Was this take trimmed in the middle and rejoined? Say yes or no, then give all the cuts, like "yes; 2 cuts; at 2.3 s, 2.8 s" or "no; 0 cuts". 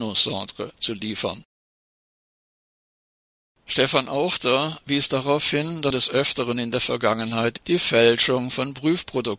yes; 1 cut; at 5.9 s